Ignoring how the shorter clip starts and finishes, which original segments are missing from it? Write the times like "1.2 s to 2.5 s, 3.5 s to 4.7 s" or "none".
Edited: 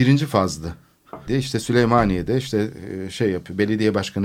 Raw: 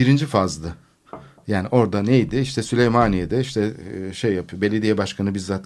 1.3 s to 2.3 s